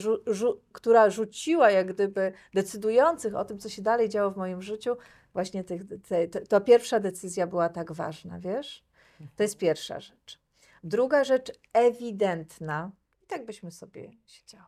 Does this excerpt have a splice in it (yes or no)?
yes